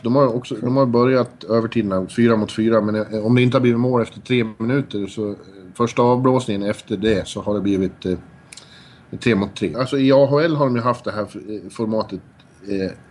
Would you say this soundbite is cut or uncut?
cut